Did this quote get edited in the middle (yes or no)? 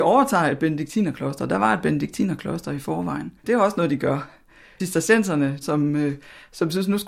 yes